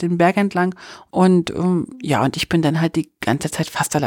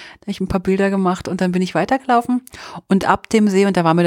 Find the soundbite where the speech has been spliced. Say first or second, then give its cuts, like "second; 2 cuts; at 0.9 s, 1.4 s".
first; 1 cut; at 1.1 s